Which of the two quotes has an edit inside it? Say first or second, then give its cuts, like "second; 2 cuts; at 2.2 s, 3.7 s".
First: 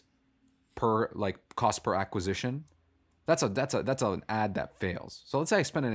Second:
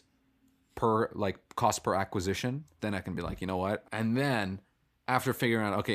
second; 2 cuts; at 2.8 s, 3.8 s